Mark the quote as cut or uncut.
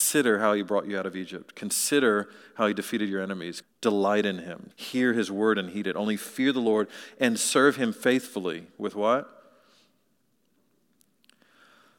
cut